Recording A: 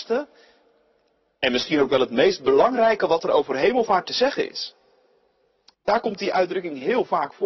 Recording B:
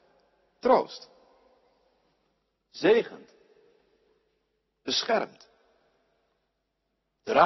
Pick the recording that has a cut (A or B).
A